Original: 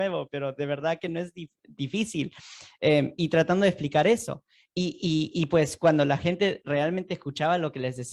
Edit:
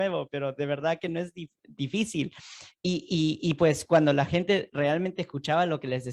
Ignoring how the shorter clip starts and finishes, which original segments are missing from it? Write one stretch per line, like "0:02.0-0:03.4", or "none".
0:02.7-0:04.6